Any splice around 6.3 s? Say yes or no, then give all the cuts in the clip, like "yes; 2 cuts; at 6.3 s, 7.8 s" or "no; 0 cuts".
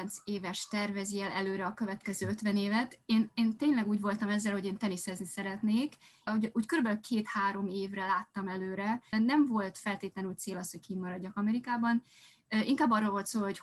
yes; 2 cuts; at 6.3 s, 9.1 s